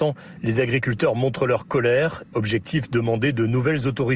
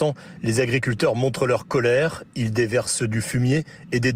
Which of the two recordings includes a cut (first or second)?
first